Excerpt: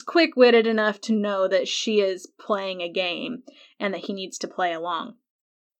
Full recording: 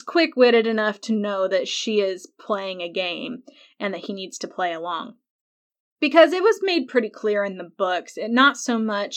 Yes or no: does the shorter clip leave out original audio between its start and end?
no